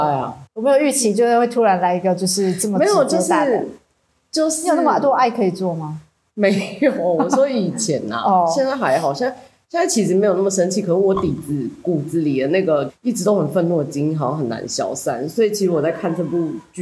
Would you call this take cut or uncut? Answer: uncut